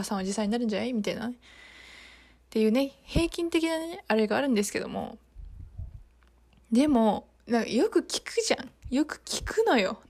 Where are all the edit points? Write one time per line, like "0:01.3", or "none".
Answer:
none